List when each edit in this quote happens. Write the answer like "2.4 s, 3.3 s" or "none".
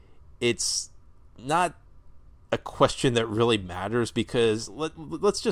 none